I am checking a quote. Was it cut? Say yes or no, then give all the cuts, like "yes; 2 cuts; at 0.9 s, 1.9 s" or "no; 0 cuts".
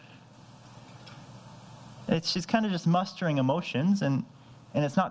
no; 0 cuts